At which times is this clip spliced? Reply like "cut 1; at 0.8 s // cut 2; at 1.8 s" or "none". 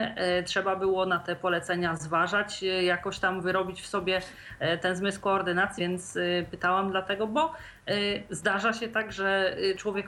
cut 1; at 5.8 s